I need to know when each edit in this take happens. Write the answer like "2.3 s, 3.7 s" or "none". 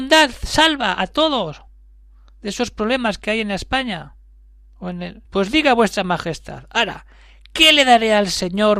5.2 s